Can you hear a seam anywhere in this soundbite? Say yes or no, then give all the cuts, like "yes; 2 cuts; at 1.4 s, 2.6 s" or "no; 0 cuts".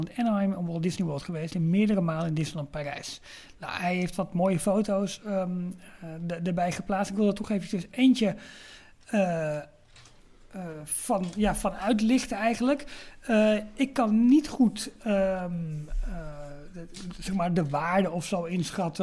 no; 0 cuts